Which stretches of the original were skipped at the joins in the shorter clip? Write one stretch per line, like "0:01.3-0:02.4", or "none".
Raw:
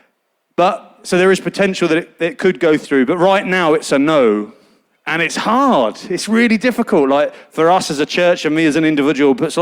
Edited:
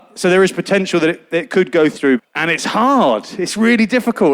0:03.1-0:04.9